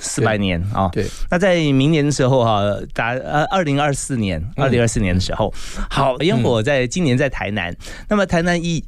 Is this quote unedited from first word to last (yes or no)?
no